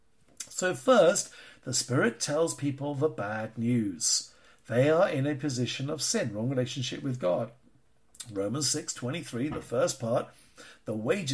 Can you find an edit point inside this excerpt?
no; 0 cuts

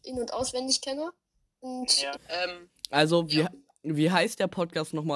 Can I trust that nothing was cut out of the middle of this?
no; 1 cut; at 2.1 s

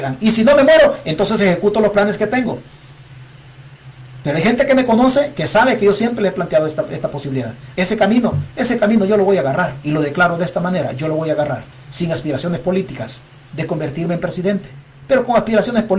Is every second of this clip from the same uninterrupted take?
no; 1 cut; at 7.7 s

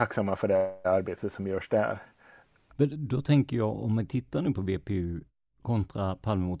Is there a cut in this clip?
yes; 1 cut; at 2.7 s

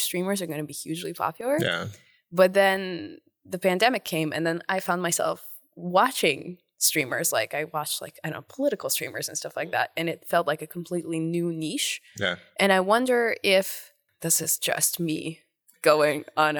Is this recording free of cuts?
yes; 0 cuts

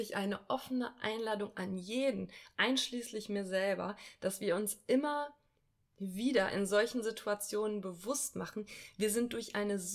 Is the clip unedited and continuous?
yes; 0 cuts

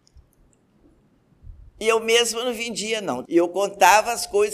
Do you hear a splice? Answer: yes; 1 cut; at 3.3 s

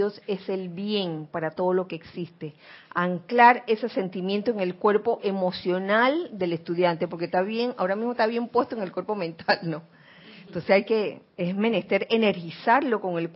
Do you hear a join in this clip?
no; 0 cuts

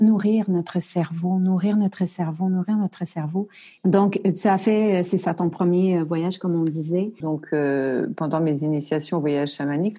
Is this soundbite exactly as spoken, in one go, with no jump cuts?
no; 2 cuts; at 3.8 s, 7.2 s

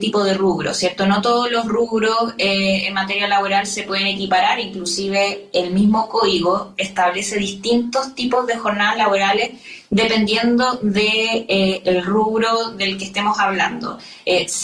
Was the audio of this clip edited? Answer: no; 0 cuts

